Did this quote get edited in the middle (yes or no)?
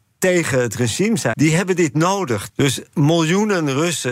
yes